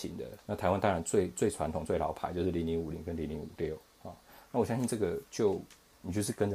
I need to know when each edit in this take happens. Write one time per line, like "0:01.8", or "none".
none